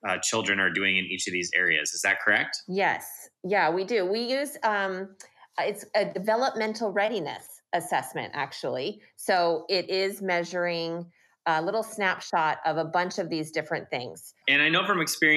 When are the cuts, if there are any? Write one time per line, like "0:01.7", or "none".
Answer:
0:14.4